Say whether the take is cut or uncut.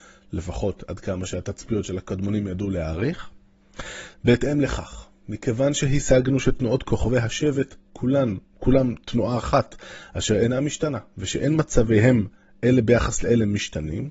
cut